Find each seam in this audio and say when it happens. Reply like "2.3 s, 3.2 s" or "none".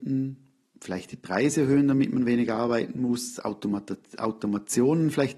none